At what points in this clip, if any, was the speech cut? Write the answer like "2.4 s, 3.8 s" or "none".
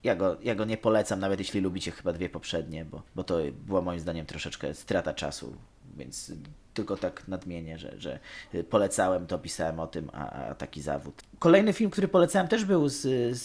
3.1 s